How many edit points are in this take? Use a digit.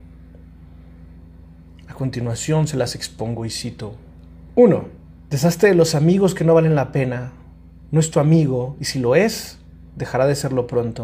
1